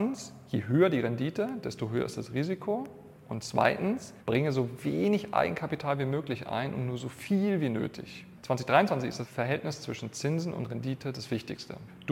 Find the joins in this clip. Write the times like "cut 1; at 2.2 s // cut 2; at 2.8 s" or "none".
none

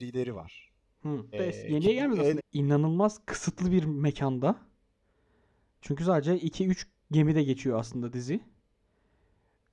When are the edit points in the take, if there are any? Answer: cut 1; at 1.3 s // cut 2; at 2.4 s

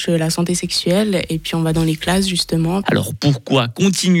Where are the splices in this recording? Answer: cut 1; at 2.8 s

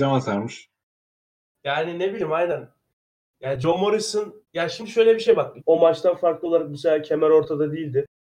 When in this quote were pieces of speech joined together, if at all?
cut 1; at 4.4 s // cut 2; at 5.6 s

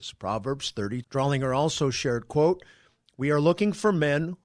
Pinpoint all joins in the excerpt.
cut 1; at 1.0 s

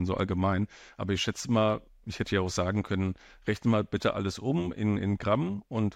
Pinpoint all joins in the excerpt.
none

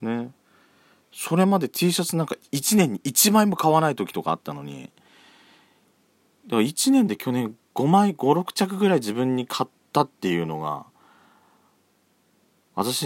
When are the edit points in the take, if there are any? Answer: cut 1; at 2.4 s

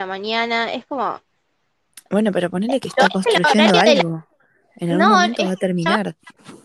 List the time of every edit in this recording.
none

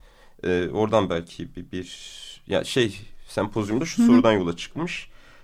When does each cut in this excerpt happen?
none

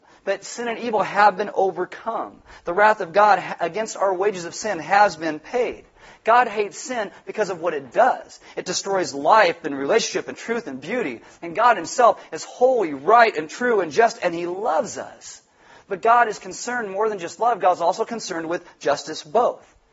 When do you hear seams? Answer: none

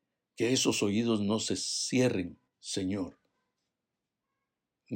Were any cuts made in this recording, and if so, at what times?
cut 1; at 2.5 s

